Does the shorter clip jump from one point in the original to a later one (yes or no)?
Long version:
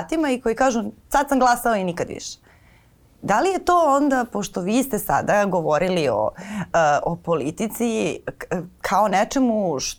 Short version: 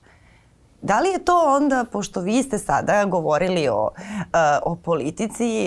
no